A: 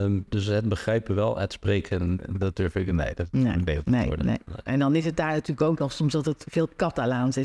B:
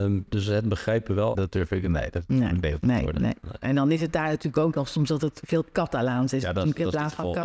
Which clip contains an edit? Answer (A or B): B